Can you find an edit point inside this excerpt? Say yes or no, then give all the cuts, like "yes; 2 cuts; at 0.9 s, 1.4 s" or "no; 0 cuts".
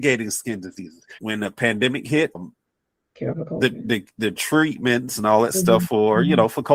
yes; 2 cuts; at 1.2 s, 2.3 s